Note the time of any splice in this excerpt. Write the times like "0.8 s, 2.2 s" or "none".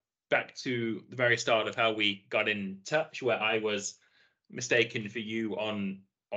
none